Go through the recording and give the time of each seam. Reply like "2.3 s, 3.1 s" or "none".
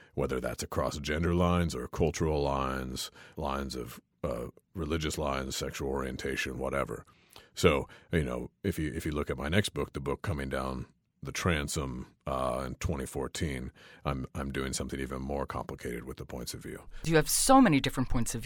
3.3 s